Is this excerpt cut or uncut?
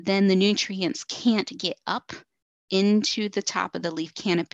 uncut